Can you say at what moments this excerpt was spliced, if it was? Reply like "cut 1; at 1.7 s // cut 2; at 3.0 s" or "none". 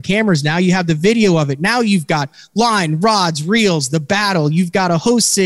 none